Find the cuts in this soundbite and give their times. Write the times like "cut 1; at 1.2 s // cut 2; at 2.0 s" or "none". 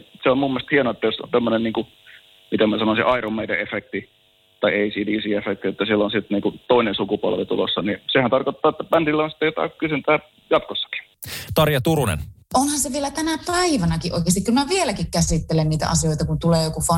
cut 1; at 11.5 s